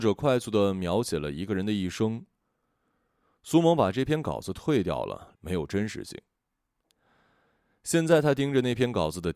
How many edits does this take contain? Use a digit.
1